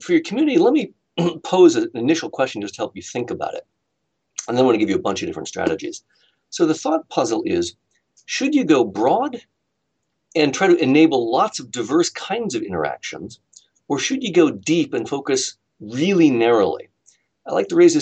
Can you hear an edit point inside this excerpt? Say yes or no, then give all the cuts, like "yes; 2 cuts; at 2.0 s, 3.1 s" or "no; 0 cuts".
no; 0 cuts